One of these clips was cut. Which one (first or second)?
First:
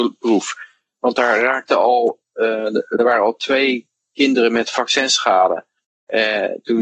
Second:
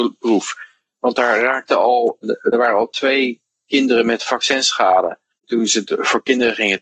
second